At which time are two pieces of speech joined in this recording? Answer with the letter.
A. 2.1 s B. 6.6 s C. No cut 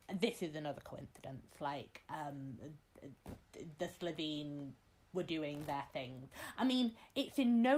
C